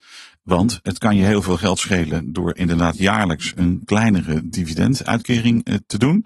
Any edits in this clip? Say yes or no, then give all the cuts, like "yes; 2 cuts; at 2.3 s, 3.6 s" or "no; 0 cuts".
no; 0 cuts